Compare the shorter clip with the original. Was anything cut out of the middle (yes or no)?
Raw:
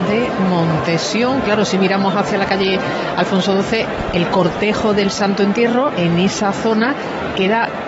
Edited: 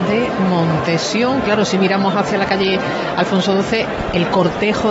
no